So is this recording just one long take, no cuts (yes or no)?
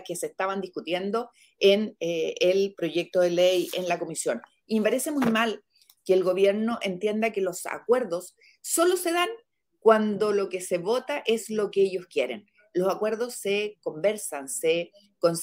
yes